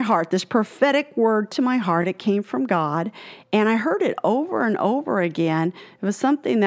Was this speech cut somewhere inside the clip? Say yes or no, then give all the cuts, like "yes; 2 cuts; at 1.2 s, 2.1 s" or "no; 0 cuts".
no; 0 cuts